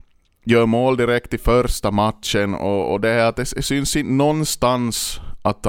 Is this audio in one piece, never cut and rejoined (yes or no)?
yes